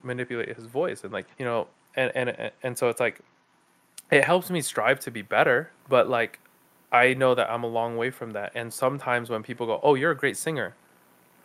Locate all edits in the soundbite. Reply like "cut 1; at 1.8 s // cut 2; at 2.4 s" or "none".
cut 1; at 1.3 s // cut 2; at 5.8 s // cut 3; at 8.7 s